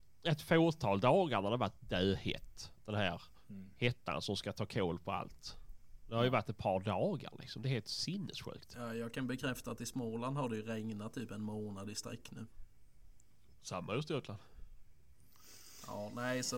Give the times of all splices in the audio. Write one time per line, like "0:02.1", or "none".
none